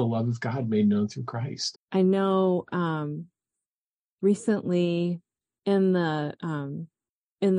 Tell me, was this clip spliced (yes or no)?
yes